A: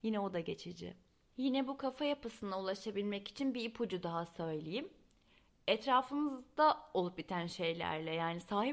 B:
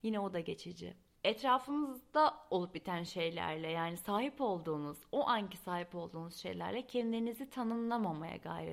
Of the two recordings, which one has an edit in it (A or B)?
B